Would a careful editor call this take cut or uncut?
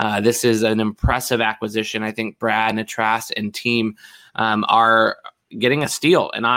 uncut